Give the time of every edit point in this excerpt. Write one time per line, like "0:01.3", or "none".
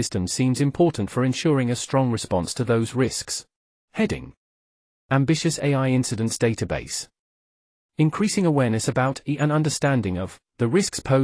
0:03.7